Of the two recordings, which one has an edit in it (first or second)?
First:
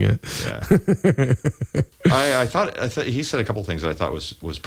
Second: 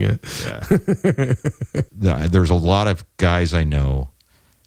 second